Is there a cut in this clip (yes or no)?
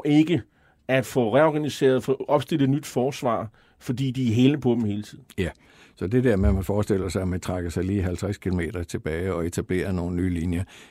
no